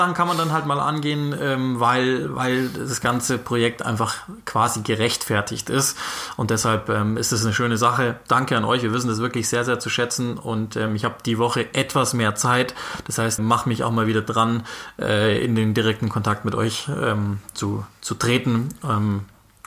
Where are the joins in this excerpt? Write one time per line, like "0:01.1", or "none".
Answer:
0:13.4